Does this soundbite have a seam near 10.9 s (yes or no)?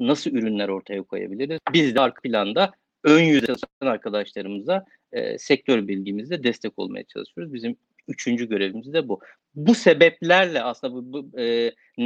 no